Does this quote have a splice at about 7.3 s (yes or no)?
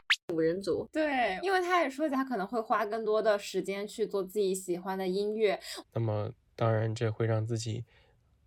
no